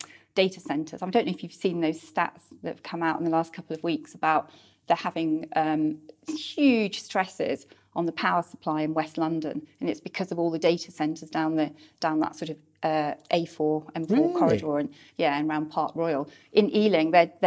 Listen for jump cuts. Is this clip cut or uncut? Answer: uncut